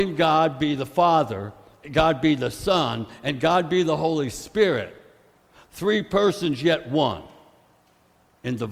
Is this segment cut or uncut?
uncut